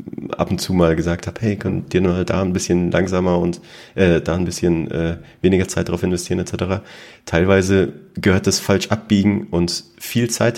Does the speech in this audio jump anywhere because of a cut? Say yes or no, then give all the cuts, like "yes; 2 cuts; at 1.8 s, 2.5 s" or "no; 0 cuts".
no; 0 cuts